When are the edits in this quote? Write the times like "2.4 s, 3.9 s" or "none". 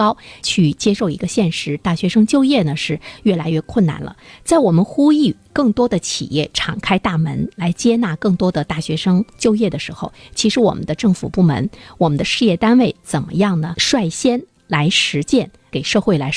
none